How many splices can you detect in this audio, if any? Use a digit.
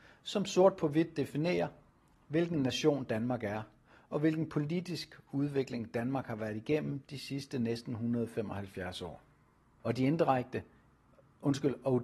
1